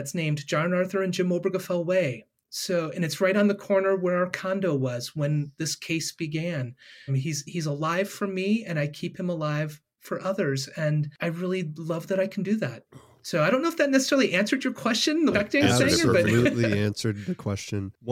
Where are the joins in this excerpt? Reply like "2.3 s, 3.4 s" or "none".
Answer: 7.1 s, 15.3 s

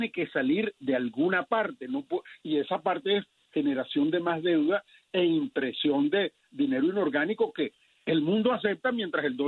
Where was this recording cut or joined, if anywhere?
none

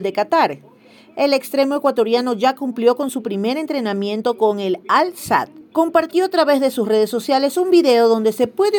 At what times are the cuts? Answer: none

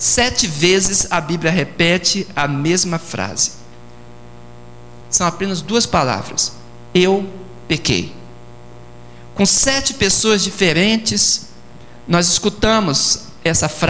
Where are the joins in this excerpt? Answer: 5.0 s

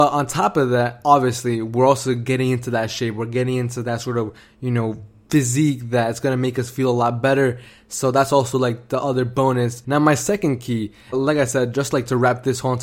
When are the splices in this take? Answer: 9.8 s, 11.1 s

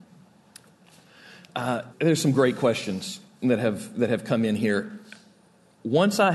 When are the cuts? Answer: 1.9 s

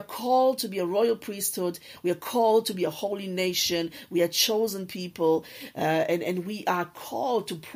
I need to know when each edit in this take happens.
none

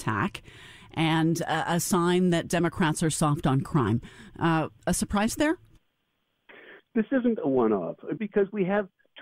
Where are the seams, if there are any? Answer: 6.8 s, 8.2 s

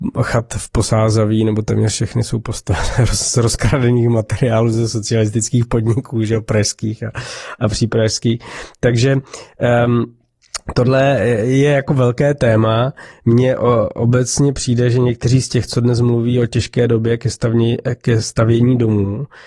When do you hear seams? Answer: none

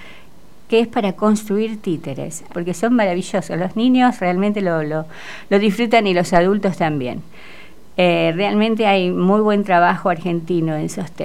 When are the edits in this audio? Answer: 2.5 s

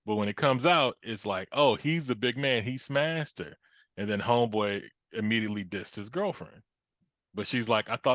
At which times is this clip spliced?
none

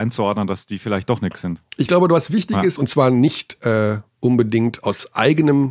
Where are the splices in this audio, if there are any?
2.8 s

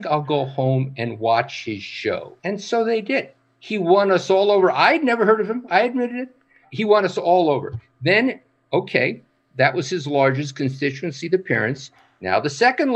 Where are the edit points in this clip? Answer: 2.4 s

